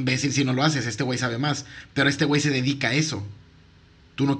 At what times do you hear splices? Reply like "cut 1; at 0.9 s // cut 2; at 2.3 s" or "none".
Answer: none